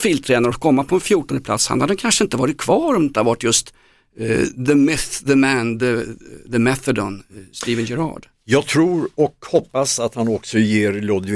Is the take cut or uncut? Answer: uncut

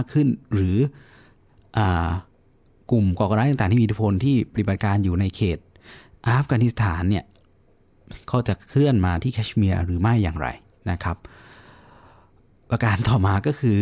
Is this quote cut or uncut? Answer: uncut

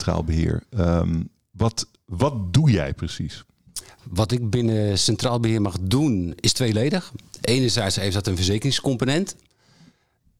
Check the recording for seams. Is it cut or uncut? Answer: uncut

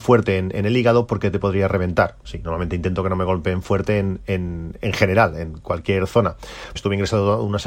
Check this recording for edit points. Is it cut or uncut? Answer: cut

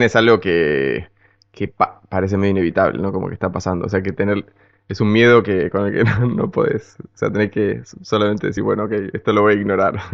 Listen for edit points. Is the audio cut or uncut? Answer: uncut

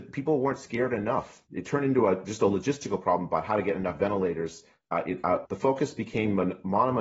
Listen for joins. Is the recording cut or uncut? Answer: cut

